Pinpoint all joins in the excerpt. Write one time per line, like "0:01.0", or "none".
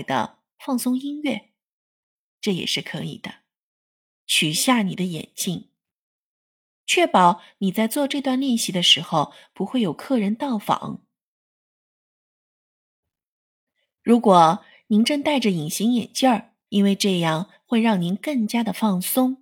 0:04.2
0:16.7